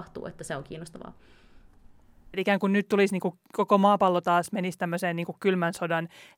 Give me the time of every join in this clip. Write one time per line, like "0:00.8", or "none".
0:02.3
0:03.4